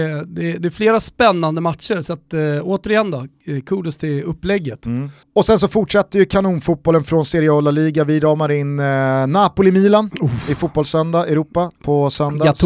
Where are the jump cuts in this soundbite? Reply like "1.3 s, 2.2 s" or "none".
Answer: none